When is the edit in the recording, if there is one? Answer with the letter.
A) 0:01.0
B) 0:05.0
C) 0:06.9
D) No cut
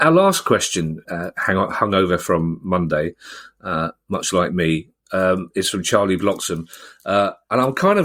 A